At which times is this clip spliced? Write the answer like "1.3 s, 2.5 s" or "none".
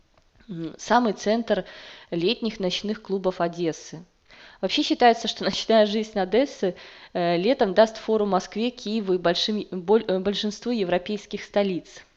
none